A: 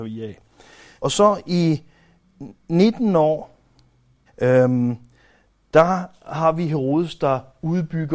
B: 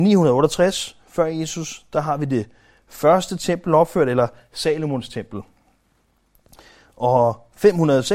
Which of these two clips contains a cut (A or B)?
A